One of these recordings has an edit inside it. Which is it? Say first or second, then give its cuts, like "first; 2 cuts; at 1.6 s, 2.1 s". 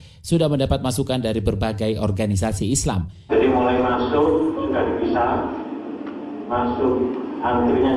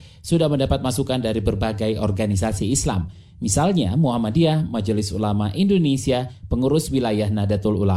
first; 1 cut; at 3.3 s